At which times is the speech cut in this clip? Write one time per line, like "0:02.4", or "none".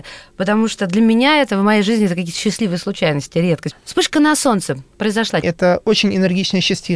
0:03.7
0:05.4